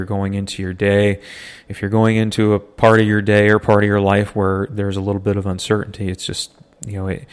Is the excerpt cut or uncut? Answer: uncut